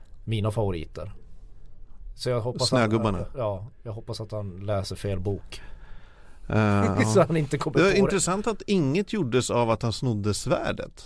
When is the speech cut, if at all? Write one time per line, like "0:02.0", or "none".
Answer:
none